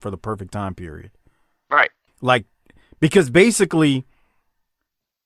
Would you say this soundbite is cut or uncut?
cut